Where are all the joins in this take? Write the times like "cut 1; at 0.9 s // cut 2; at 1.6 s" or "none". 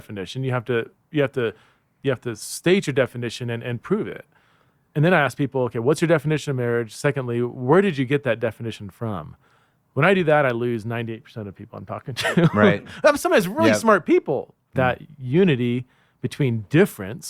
cut 1; at 14.7 s